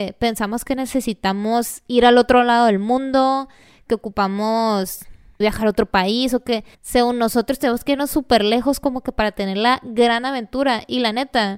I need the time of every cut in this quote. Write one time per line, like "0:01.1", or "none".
0:05.4
0:06.7

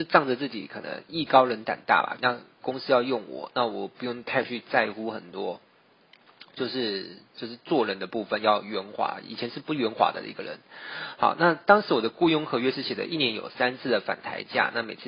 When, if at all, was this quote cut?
0:02.2

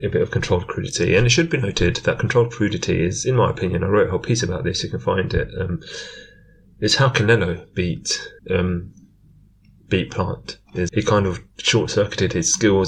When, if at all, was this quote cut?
0:08.4
0:10.9

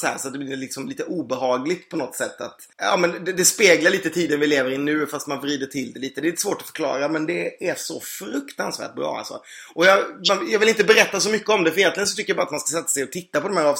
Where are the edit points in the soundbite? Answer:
0:02.7

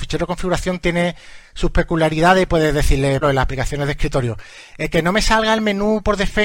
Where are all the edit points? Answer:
0:03.2

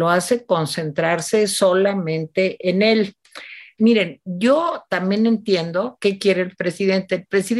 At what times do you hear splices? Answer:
0:03.8

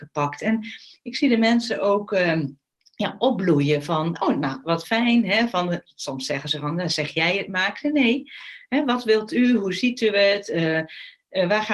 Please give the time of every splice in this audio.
0:04.6

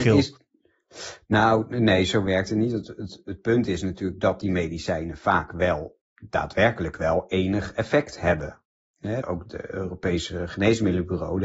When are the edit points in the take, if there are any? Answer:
0:09.5

